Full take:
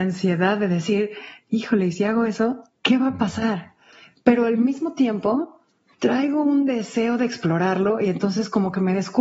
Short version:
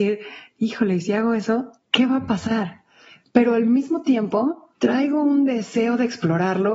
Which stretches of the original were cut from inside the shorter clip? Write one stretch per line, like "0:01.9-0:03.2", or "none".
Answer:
0:05.7-0:06.0